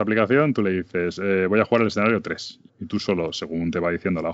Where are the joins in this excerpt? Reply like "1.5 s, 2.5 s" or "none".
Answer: 2.7 s